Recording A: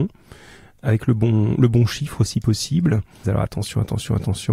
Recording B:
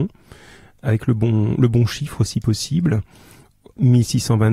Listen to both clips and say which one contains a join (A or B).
A